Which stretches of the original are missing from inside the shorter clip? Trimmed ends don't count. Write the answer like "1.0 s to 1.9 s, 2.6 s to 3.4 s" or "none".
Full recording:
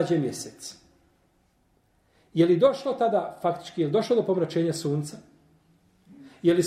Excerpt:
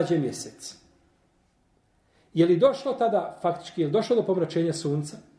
none